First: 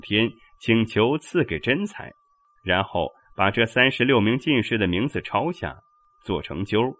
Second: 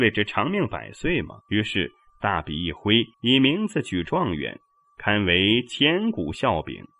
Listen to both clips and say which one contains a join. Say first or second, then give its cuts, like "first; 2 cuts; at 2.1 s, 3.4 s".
second; 2 cuts; at 1.4 s, 3.1 s